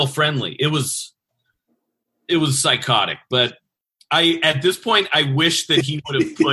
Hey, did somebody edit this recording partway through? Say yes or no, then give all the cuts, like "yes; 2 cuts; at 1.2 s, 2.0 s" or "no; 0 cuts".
no; 0 cuts